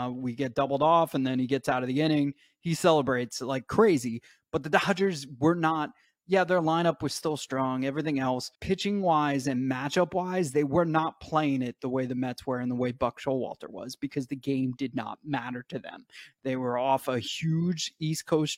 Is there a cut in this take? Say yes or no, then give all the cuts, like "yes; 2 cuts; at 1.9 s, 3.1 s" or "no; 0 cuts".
yes; 1 cut; at 8.5 s